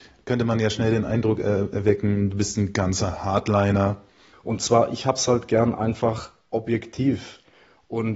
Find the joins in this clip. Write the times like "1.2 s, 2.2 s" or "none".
4.3 s